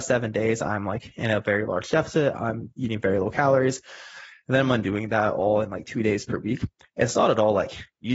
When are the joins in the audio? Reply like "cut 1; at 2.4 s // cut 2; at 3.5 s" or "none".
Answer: none